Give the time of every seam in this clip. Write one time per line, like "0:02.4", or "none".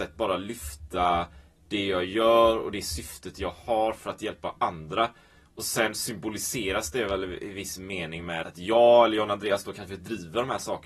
0:08.4